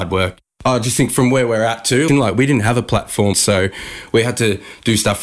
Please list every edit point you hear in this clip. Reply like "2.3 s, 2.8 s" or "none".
2.1 s, 3.3 s